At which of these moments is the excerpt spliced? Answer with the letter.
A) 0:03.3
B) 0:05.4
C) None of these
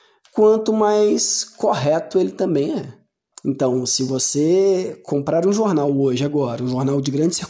A